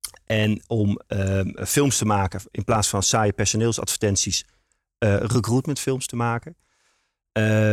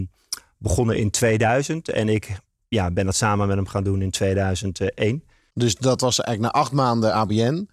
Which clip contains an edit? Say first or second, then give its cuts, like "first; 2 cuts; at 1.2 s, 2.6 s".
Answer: first; 1 cut; at 1.6 s